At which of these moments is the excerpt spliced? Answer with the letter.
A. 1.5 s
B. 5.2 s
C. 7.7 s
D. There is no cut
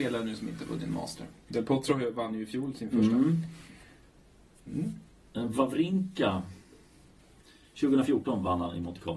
A